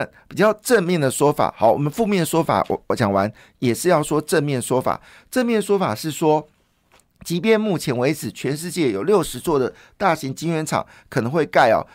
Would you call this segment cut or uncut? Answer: uncut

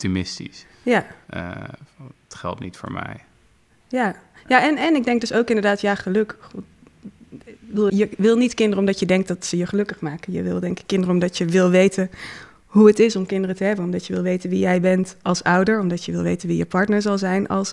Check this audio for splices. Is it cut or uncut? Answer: cut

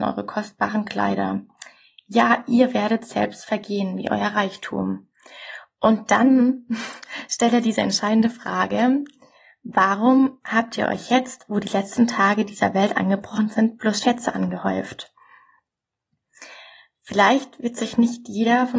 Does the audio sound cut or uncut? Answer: uncut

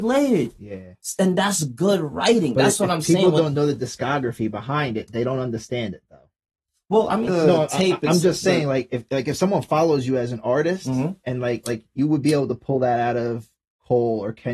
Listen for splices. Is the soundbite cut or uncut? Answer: cut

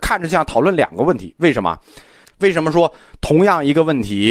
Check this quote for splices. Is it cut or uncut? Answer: cut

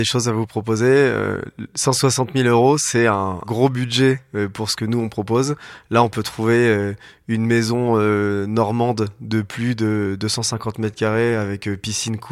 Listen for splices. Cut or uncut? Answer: uncut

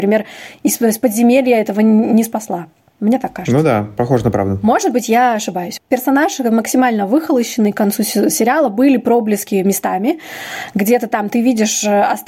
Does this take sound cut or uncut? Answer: cut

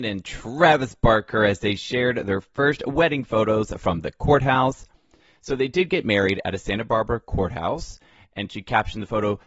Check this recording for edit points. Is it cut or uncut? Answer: uncut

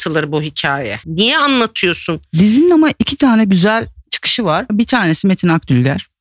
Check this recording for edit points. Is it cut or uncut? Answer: cut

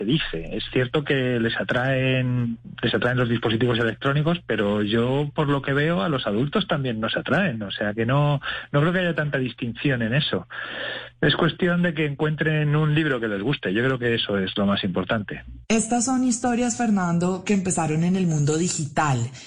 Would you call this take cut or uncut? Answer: uncut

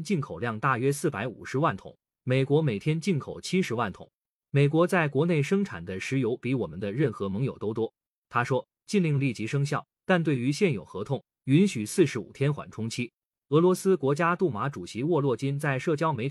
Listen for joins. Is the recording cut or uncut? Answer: uncut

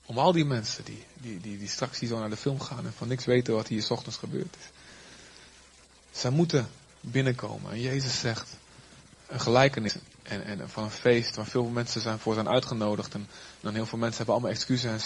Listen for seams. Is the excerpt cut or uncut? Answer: uncut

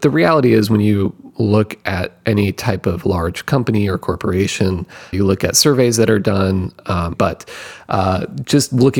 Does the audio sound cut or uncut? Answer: cut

